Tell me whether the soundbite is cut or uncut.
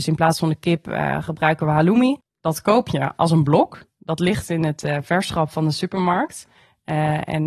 uncut